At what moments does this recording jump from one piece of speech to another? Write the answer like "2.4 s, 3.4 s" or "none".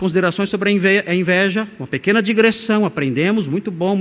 none